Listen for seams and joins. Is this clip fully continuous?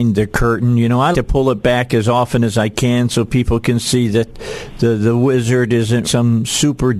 no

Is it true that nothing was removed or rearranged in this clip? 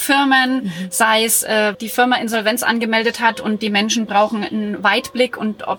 no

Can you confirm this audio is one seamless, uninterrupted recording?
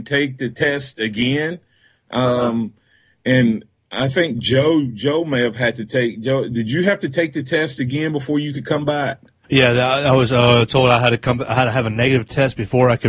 yes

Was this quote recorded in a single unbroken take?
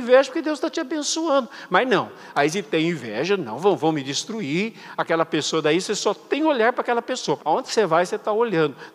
no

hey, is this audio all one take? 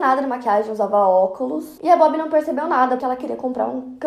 no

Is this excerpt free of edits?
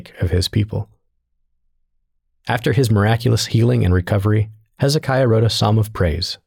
yes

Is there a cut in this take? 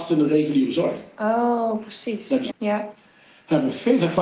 yes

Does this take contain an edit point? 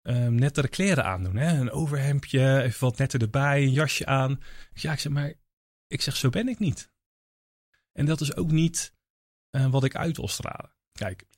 no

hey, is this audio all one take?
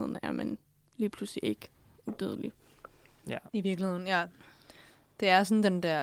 yes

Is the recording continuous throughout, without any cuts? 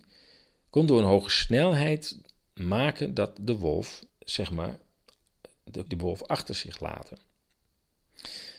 no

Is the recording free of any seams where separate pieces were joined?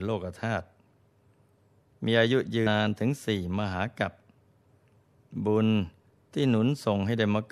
no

